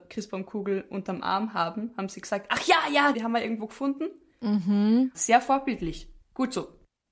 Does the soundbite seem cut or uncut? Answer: cut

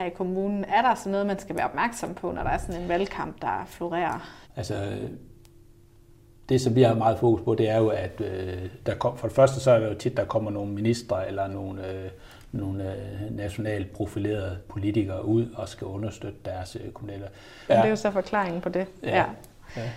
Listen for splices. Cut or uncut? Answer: cut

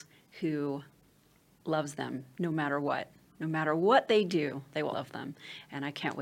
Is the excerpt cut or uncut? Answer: cut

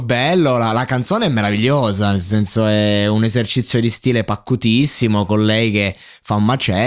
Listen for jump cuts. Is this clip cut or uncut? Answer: uncut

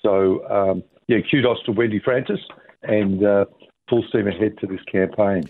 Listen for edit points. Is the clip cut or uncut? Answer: cut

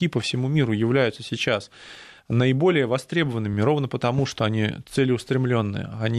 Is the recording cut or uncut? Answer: uncut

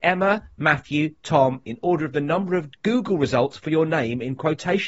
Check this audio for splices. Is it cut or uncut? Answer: cut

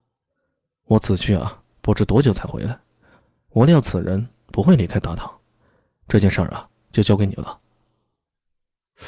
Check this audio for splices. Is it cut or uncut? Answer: uncut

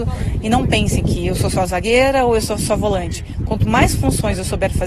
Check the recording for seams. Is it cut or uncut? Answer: uncut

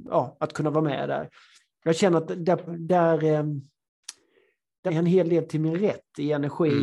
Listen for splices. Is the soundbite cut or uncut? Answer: cut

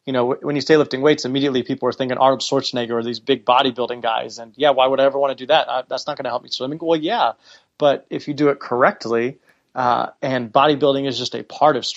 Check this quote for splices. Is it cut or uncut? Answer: uncut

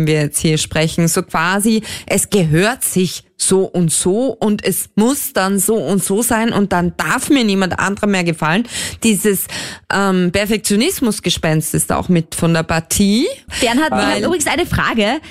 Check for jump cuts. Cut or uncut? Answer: uncut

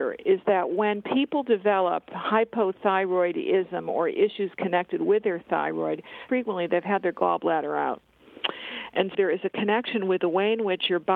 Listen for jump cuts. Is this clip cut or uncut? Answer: cut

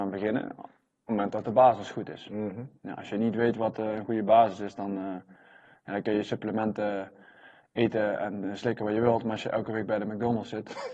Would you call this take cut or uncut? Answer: uncut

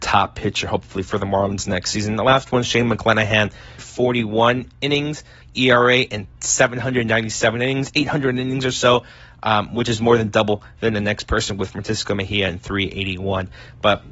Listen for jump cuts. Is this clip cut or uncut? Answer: cut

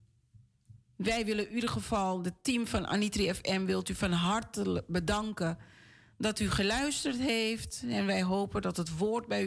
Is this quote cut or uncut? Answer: uncut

